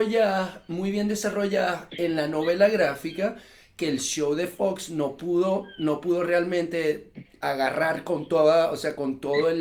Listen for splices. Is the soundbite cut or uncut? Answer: uncut